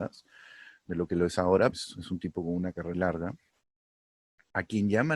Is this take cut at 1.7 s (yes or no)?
yes